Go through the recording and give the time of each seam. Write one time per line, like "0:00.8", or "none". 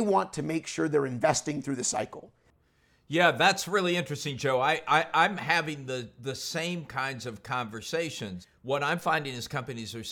none